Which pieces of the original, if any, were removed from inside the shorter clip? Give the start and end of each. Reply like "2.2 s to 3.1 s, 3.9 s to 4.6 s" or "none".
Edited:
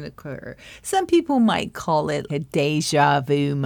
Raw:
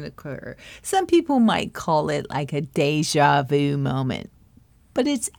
2.3 s to 2.5 s